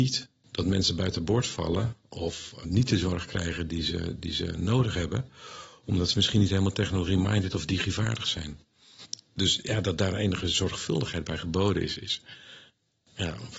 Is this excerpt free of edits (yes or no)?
no